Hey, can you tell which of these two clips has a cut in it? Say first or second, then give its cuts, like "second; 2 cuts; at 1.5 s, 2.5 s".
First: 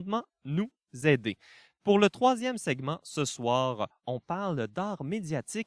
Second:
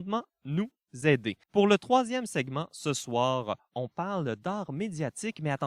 second; 1 cut; at 1.4 s